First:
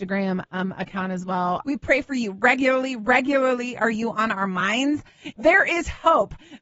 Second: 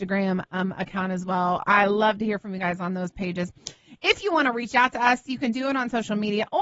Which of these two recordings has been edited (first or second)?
first